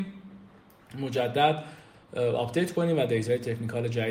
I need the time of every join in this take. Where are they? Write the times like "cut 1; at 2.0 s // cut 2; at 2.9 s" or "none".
none